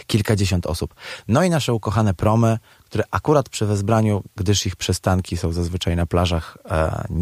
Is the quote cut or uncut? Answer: uncut